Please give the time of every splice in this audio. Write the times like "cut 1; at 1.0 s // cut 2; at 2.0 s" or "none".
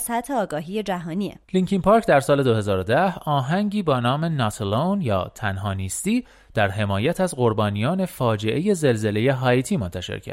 cut 1; at 1.4 s